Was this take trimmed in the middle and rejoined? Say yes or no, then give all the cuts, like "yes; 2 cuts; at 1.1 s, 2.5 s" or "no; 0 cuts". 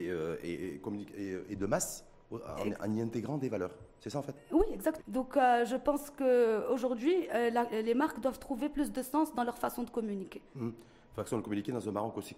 yes; 1 cut; at 5.0 s